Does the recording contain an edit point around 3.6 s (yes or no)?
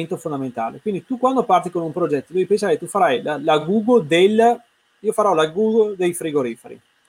no